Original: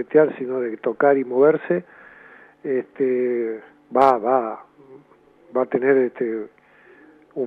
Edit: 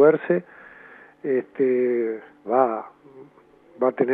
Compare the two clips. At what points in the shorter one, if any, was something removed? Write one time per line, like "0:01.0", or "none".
0:02.4